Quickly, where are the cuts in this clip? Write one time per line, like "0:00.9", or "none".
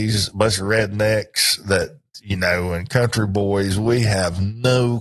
none